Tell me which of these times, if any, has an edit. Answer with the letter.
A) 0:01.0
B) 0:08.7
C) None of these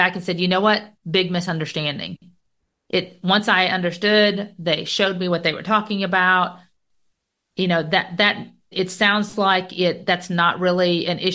B